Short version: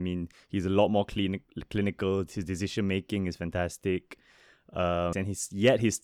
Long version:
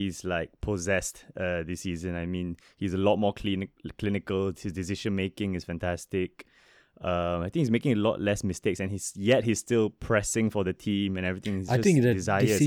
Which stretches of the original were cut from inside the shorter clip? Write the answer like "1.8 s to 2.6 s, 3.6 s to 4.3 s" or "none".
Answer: 7.4 s to 8.8 s